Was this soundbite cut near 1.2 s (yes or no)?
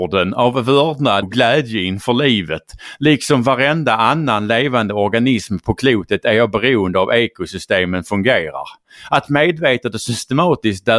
yes